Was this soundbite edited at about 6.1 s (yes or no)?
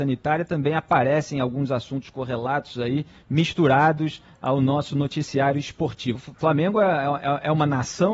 yes